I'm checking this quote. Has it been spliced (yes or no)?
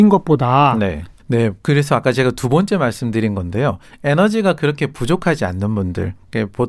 yes